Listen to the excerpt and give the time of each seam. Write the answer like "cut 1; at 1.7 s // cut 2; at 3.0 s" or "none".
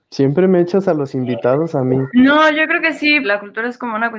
cut 1; at 2.1 s // cut 2; at 3.2 s